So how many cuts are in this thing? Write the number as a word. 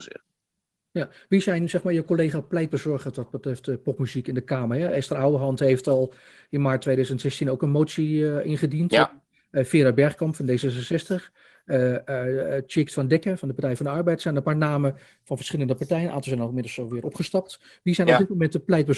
zero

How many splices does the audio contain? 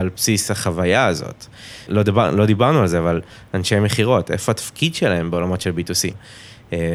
one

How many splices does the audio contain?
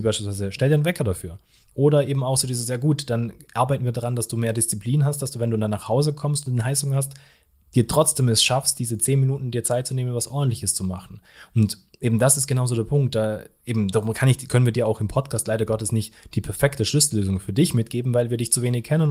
zero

